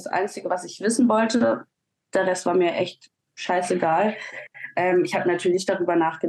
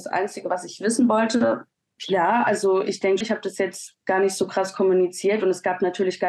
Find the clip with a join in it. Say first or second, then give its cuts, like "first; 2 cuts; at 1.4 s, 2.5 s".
second; 2 cuts; at 2.0 s, 3.2 s